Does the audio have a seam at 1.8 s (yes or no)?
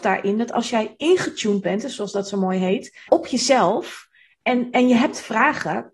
no